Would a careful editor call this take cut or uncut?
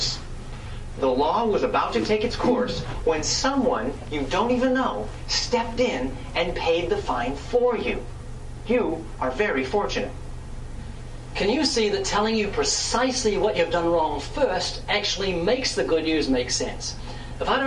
uncut